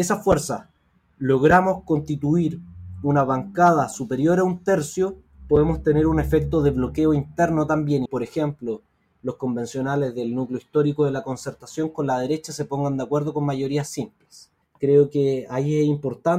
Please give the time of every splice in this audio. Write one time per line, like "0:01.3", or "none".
0:08.1
0:14.6